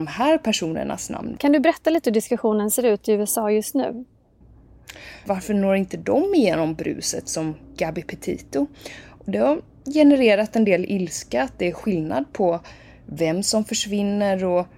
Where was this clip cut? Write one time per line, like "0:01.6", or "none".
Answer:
0:01.4
0:05.2